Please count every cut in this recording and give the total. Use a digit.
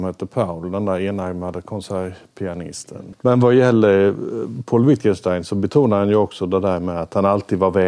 1